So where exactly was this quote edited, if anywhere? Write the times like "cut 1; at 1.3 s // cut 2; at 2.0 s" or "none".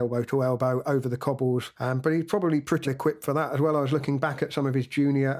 cut 1; at 1.7 s // cut 2; at 2.8 s